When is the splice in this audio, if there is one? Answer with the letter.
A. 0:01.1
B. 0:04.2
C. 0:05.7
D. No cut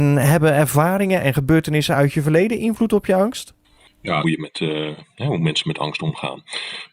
B